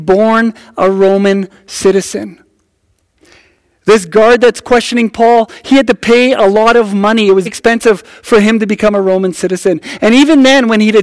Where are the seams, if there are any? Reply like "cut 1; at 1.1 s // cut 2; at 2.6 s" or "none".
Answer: cut 1; at 7.5 s